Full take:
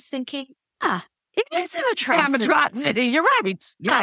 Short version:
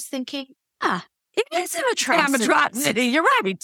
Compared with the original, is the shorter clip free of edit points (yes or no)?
yes